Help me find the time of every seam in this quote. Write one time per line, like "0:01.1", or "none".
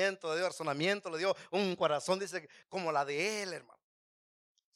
none

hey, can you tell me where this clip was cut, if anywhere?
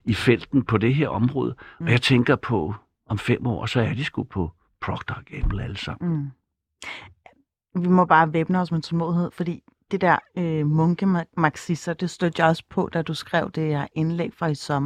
none

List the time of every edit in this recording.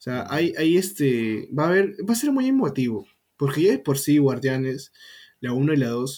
none

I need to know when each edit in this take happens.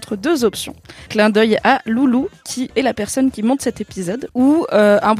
0:01.1
0:02.7
0:04.3

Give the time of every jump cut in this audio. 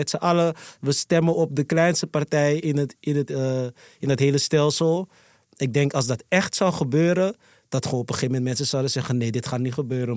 none

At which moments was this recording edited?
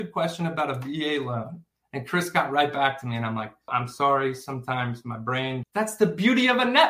0:03.7
0:05.6

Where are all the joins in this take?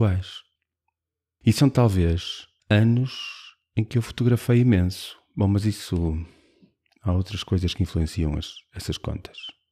none

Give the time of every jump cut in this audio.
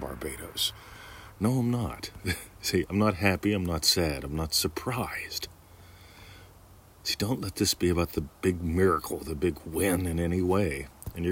0:01.3

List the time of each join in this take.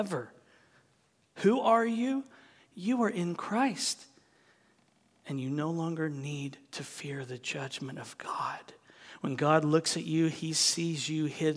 none

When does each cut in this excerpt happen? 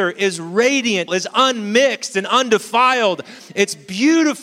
0:01.1

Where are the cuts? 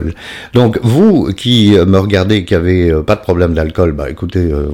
none

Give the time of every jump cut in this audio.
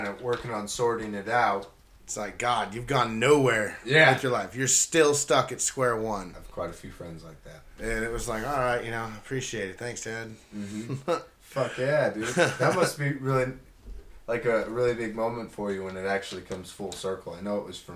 0:02.0

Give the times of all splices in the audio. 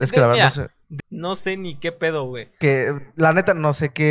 0:01.0
0:02.6

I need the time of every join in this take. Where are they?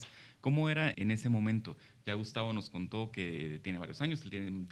0:00.9

